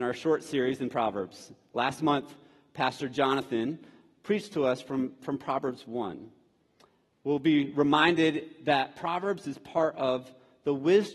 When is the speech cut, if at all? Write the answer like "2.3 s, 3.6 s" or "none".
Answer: none